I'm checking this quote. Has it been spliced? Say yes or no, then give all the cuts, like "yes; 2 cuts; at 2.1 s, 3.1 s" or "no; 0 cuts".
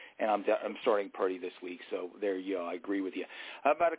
no; 0 cuts